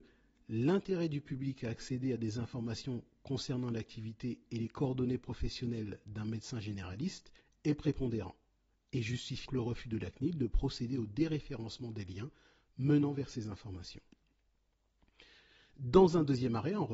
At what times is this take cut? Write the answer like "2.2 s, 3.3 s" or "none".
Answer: 9.5 s